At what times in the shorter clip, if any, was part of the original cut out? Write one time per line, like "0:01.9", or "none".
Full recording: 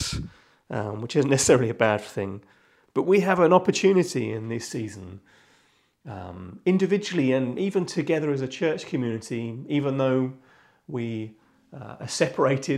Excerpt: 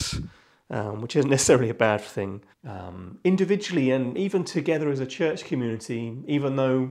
0:02.5